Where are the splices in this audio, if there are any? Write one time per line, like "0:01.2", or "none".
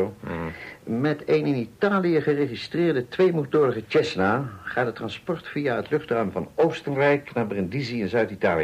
none